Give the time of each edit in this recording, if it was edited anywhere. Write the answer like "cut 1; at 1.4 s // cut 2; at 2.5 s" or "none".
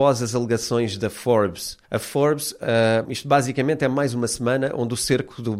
cut 1; at 1.8 s // cut 2; at 3.0 s